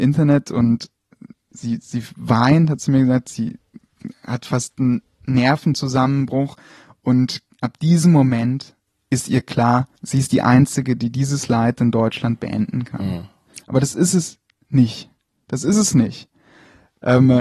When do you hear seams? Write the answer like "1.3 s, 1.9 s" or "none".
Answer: 1.5 s, 10.0 s, 13.6 s

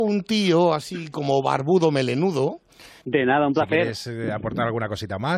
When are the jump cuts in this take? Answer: 3.0 s

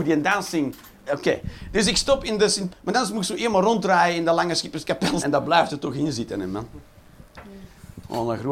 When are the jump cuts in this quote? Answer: 1.1 s, 2.7 s, 5.2 s

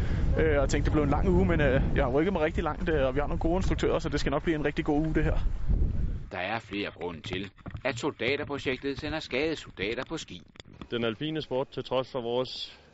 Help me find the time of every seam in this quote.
none

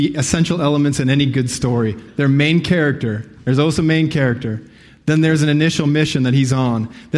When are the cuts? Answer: none

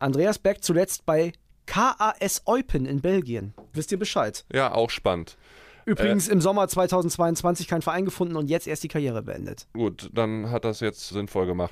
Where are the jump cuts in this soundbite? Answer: 3.7 s

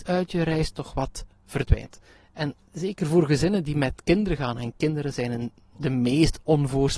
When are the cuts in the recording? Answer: none

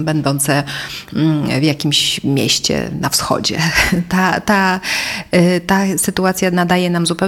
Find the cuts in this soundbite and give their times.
none

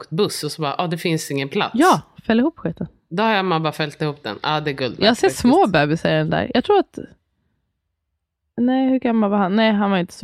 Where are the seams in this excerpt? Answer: none

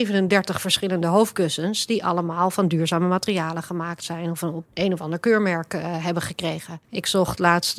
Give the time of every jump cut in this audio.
4.7 s, 6.8 s

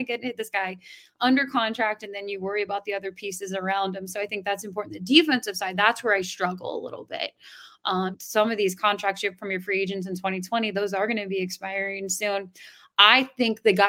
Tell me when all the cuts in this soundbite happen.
8.1 s

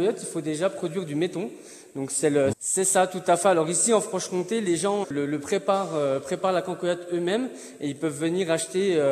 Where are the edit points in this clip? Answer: 2.5 s, 5.0 s

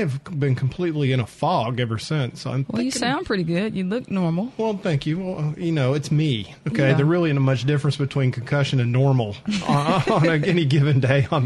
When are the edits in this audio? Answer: none

